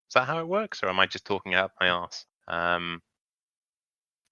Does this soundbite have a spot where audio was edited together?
yes; 1 cut; at 2.2 s

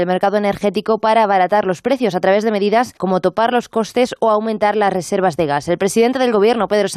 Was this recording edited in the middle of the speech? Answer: yes; 1 cut; at 3.0 s

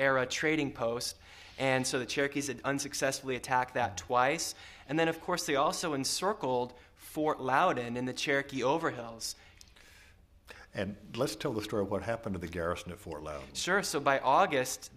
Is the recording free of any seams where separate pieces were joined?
yes; 0 cuts

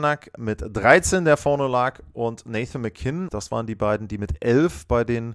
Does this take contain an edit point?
yes; 1 cut; at 3.3 s

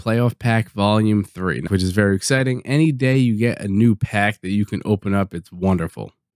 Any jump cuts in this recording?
yes; 1 cut; at 1.7 s

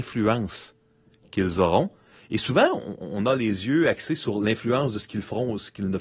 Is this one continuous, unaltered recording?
no; 1 cut; at 3.0 s

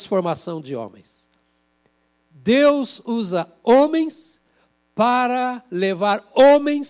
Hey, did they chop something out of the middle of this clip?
no; 0 cuts

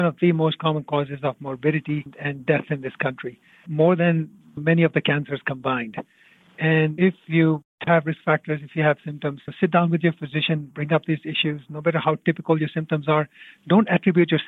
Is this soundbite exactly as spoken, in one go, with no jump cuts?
yes; 0 cuts

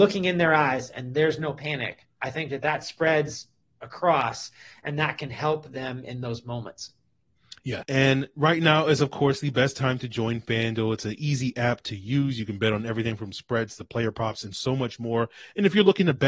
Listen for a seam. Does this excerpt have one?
yes; 1 cut; at 7.8 s

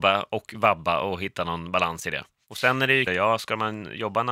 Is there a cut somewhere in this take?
yes; 1 cut; at 3.1 s

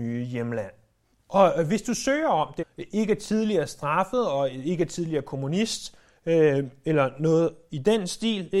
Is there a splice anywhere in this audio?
yes; 2 cuts; at 1.1 s, 2.6 s

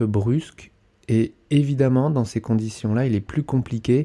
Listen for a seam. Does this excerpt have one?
no; 0 cuts

